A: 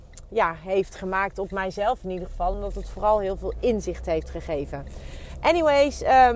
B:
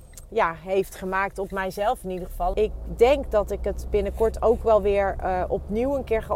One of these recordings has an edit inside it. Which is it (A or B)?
B